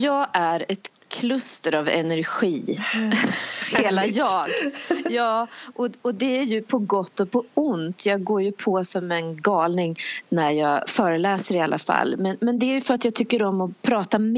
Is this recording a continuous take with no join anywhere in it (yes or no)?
yes